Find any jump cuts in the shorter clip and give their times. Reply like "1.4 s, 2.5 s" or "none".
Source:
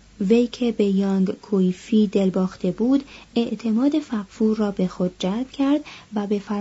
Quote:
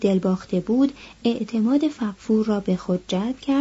none